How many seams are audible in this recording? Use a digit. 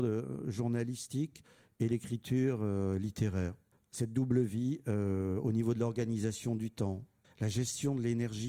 0